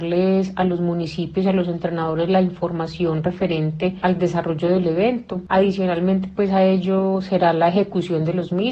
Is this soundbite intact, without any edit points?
yes; 0 cuts

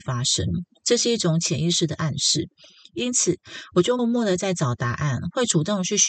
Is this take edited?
yes; 1 cut; at 4.0 s

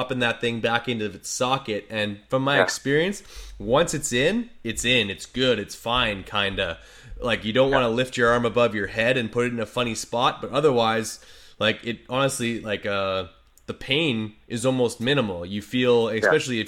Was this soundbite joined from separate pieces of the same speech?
no; 0 cuts

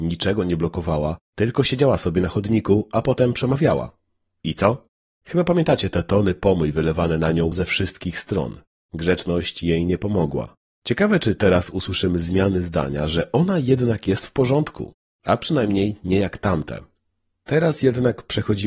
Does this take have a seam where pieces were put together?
no; 0 cuts

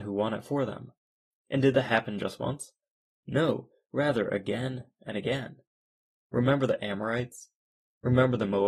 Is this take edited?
yes; 1 cut; at 1.3 s

